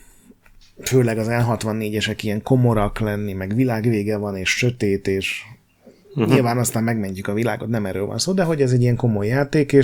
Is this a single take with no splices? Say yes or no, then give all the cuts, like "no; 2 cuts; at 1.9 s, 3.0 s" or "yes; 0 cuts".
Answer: yes; 0 cuts